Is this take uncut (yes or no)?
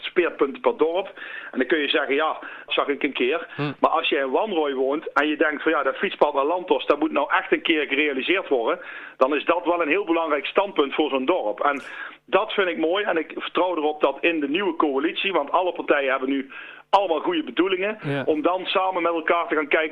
no